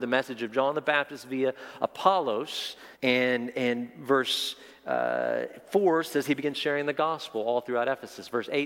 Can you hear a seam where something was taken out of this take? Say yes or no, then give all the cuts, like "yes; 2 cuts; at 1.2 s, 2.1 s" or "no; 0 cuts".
yes; 1 cut; at 2.9 s